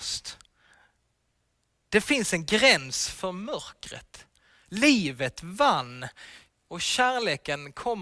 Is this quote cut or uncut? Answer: cut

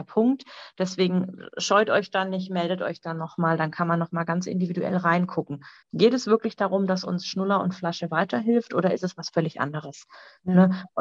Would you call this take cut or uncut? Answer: cut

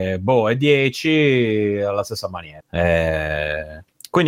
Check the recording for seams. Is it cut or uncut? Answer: uncut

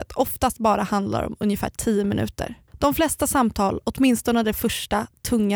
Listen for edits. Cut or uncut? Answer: cut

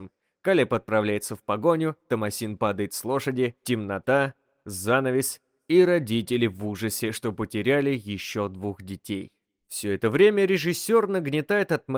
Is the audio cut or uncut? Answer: uncut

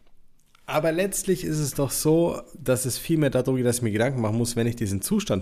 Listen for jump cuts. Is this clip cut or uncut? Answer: uncut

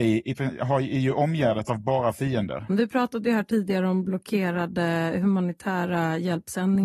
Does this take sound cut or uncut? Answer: cut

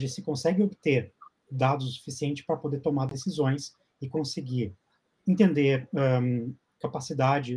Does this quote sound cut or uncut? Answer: uncut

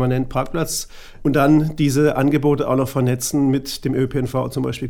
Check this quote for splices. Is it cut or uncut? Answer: cut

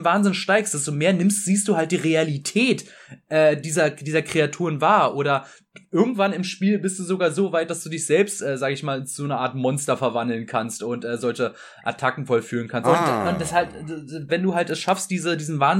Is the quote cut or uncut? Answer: cut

